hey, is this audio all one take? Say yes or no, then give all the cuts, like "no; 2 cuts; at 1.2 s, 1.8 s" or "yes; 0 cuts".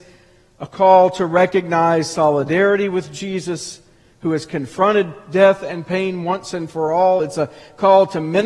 yes; 0 cuts